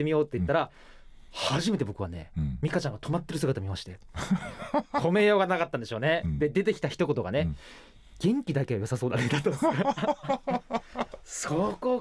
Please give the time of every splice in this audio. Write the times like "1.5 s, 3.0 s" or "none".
none